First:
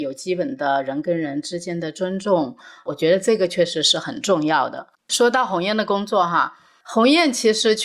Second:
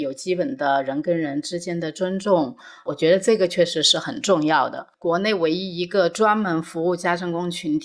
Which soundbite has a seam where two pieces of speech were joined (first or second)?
second